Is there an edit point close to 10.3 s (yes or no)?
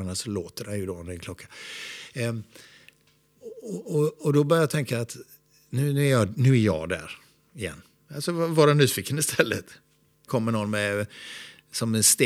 yes